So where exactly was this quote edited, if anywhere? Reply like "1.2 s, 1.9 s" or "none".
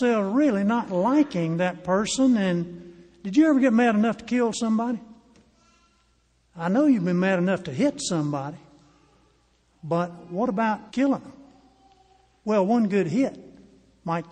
10.9 s